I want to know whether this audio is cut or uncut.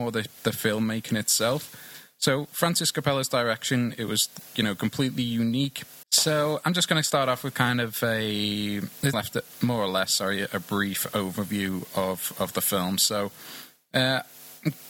cut